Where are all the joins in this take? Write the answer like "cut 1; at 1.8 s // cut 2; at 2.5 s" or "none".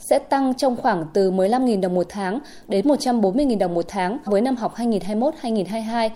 cut 1; at 4.3 s